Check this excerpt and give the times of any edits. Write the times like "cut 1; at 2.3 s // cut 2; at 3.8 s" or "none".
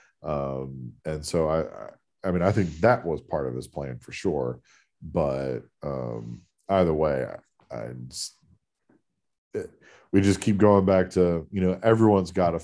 cut 1; at 1.0 s